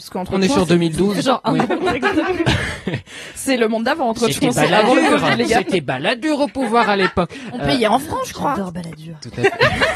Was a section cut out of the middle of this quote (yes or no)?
no